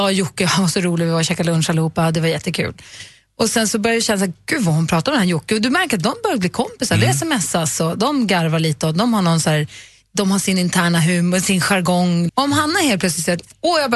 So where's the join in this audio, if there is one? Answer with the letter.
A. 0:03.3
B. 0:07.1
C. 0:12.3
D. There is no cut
C